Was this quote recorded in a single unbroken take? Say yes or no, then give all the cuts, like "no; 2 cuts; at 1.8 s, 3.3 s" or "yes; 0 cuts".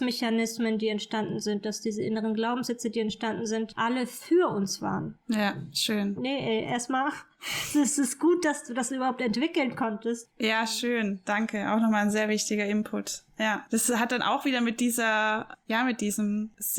no; 1 cut; at 6.2 s